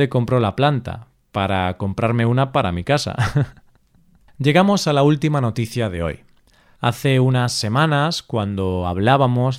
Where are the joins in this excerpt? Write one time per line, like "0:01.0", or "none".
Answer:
none